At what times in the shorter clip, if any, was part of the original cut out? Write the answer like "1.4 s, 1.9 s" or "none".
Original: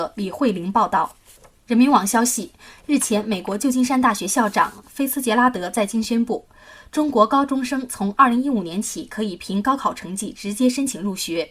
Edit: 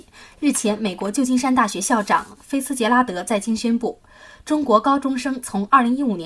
none